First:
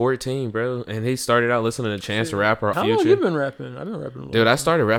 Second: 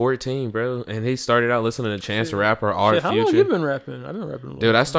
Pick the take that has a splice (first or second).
first